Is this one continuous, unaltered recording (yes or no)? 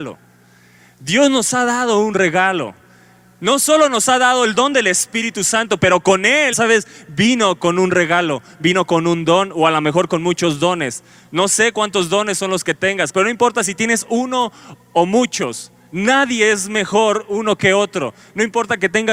no